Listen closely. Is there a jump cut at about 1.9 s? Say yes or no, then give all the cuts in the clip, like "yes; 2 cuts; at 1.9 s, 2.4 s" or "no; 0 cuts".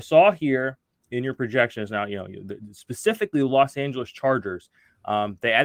no; 0 cuts